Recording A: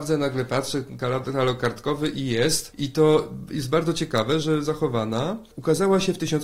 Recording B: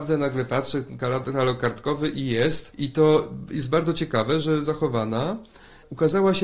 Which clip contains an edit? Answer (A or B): A